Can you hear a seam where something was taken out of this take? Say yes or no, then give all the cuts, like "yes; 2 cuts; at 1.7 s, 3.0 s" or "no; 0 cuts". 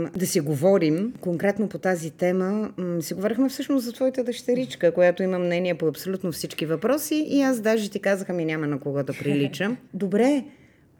yes; 1 cut; at 9.9 s